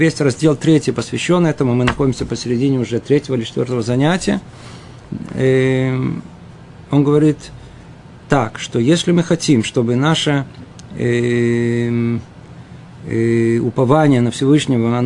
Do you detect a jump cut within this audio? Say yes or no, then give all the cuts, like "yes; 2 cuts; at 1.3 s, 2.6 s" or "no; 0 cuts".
no; 0 cuts